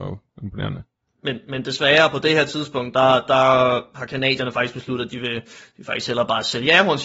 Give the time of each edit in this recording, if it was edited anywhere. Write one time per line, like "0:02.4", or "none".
none

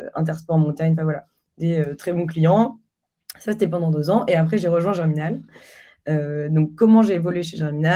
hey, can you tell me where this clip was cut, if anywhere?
none

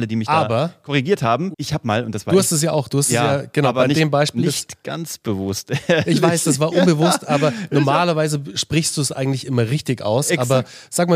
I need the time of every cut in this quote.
0:01.5

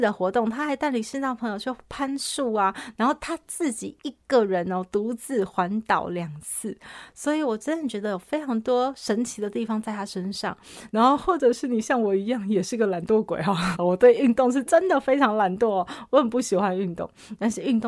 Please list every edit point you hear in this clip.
0:10.9
0:13.7

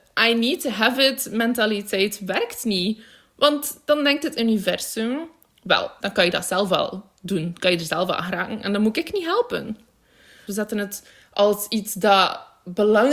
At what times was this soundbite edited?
0:06.0
0:10.5

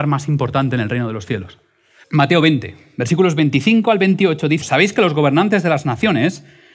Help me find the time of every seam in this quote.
0:02.0
0:04.6

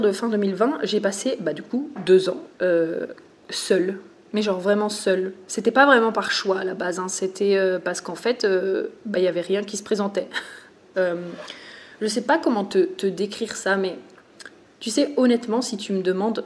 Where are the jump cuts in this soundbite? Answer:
0:10.9

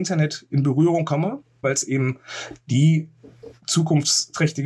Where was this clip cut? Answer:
0:01.6

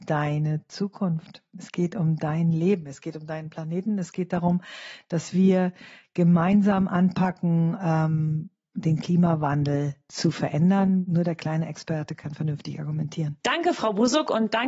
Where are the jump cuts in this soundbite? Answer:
0:13.4

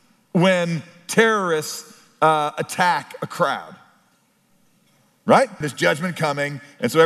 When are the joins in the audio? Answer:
0:05.6

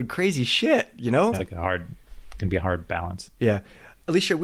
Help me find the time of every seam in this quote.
0:01.3

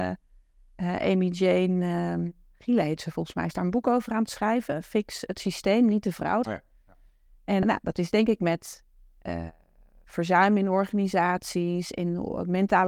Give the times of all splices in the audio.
0:06.4
0:07.6

